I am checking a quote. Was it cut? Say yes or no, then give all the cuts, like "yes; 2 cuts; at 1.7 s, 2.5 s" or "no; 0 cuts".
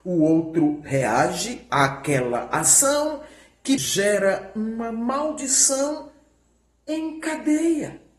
yes; 1 cut; at 3.8 s